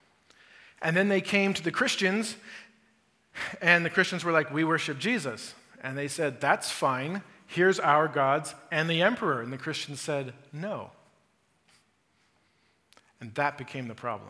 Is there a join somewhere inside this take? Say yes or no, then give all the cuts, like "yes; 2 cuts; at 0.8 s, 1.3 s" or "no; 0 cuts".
no; 0 cuts